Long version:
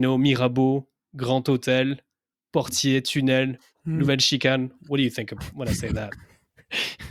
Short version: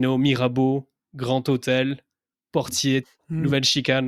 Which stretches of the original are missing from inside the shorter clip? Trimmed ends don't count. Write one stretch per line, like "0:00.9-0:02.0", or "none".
0:03.0-0:03.6